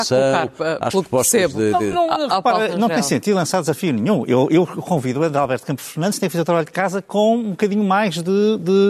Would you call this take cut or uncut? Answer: uncut